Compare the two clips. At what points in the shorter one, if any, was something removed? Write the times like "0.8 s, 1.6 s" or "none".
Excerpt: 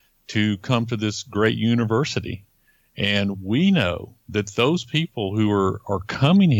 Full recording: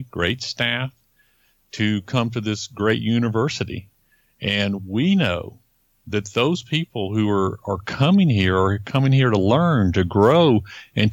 4.2 s

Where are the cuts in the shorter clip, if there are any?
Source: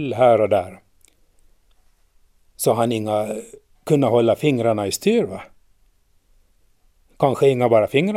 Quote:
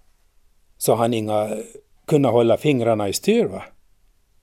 none

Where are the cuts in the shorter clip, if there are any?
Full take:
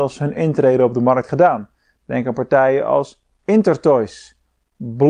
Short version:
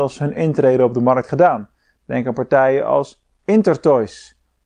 none

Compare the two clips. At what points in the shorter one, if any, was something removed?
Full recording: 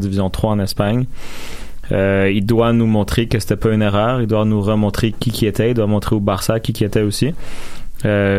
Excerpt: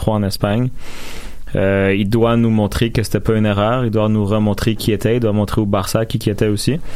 4.8 s

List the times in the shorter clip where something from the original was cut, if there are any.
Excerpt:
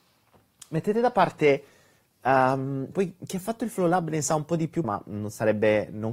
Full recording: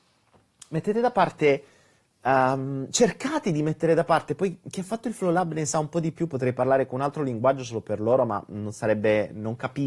2.9 s, 4.8 s

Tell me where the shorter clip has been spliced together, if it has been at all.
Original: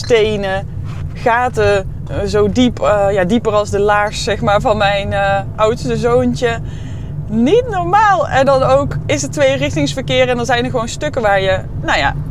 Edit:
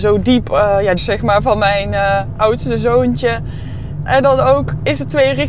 1.0 s, 4.1 s

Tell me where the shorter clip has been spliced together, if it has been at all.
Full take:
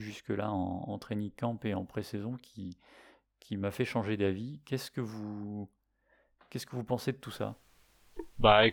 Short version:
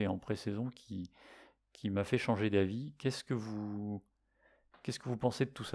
none

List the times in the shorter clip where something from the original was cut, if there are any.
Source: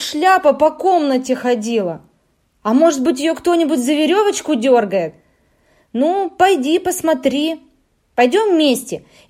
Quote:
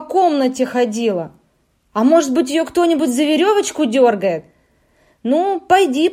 none

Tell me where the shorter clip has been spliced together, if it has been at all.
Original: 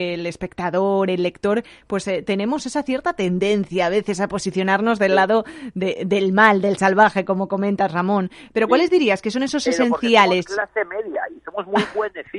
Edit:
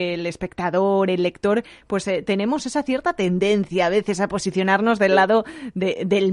none

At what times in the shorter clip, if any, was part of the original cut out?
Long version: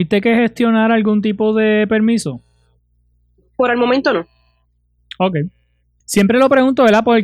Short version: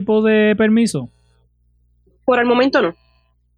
none

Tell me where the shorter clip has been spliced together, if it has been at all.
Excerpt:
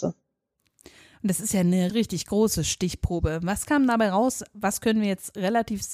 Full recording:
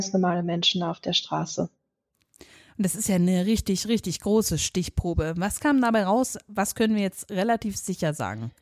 1.9 s

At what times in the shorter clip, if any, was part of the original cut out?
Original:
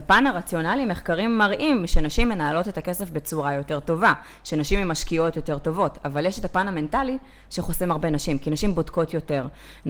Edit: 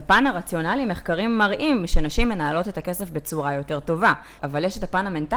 4.4 s

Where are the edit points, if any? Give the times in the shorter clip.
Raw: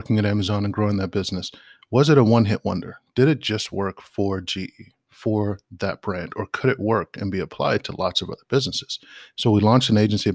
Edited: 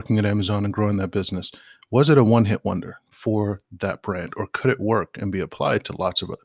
3.1 s

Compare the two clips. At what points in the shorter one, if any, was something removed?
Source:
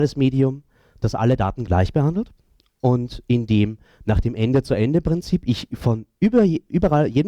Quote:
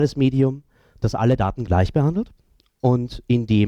none

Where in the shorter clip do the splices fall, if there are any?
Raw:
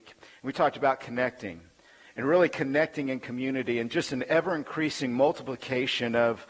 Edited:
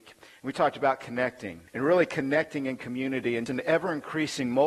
1.7 s, 3.5 s

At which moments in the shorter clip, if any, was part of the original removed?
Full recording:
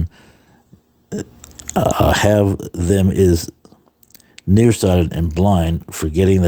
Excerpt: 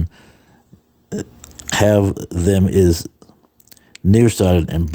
1.7 s

